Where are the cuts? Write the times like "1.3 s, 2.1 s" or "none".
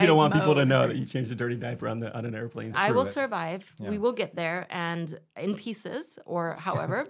2.7 s